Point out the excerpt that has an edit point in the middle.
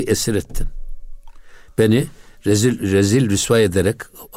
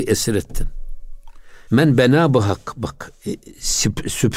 second; 2 cuts; at 1.7 s, 3.1 s

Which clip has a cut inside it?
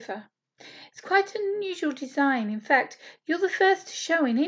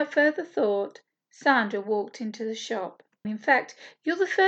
second; 1 cut; at 3.2 s

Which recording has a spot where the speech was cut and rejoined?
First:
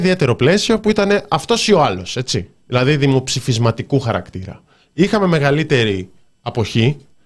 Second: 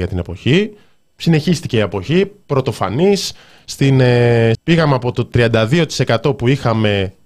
second; 1 cut; at 4.5 s

